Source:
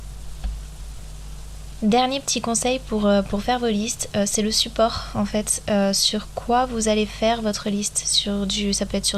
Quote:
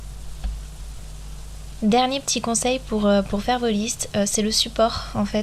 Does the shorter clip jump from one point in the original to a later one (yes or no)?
no